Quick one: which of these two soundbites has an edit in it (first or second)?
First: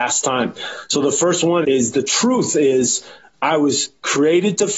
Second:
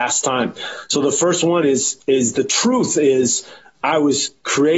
first